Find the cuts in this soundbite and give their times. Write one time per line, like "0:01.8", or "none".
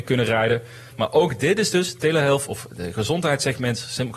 0:00.9